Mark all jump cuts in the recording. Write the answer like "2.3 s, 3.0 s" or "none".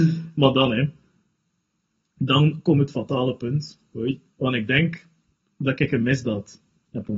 none